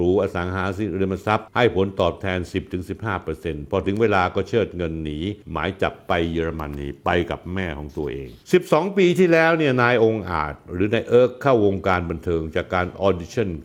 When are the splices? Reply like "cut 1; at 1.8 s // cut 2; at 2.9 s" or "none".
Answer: cut 1; at 5.4 s